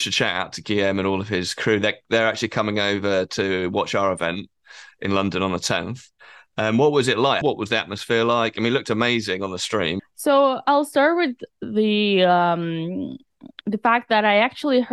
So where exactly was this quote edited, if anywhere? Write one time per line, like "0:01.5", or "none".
0:07.4
0:10.0

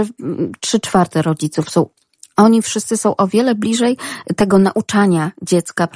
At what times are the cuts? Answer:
none

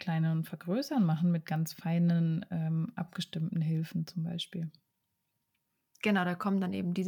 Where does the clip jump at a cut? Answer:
none

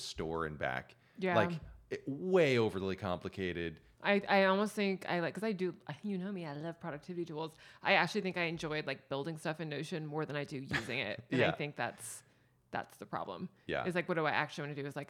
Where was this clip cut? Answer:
0:03.9

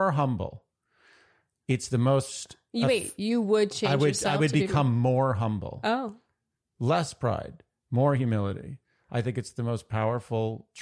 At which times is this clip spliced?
none

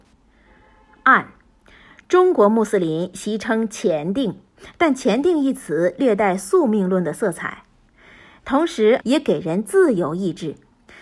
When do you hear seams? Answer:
0:09.0

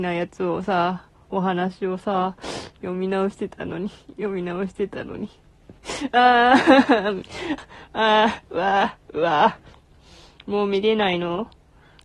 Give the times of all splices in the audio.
0:07.6

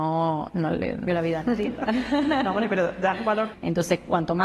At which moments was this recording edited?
0:01.1
0:03.5

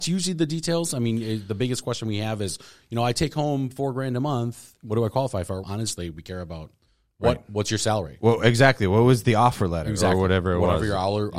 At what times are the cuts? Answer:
0:05.6

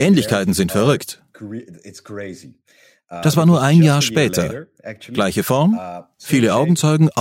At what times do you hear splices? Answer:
none

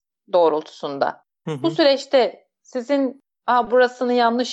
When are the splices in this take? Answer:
none

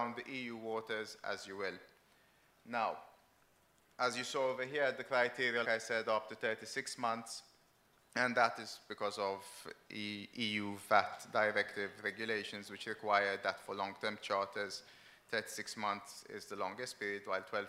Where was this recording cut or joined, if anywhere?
0:05.6

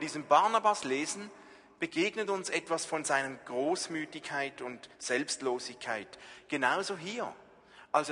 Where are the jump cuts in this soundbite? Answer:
none

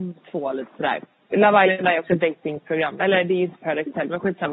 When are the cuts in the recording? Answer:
0:01.3

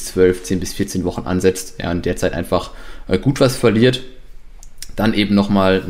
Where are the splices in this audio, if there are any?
none

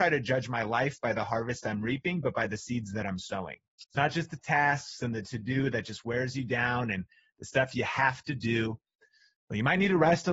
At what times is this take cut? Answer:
0:03.8

